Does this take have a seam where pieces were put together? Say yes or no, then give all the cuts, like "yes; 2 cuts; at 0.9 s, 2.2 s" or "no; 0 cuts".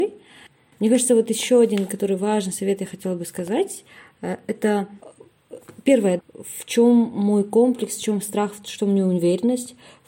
yes; 1 cut; at 6.2 s